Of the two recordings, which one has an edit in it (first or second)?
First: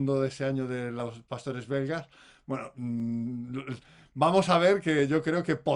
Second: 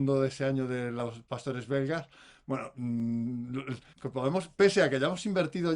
second